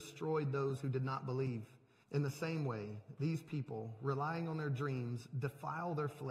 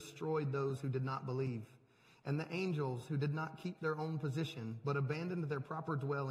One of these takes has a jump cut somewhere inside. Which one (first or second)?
first